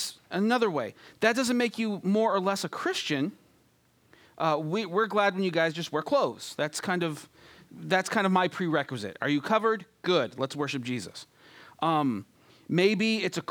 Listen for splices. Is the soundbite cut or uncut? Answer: uncut